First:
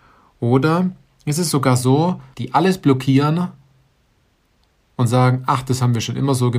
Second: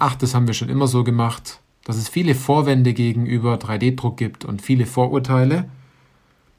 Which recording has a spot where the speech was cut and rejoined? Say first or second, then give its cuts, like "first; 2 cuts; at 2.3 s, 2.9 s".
first; 1 cut; at 2.3 s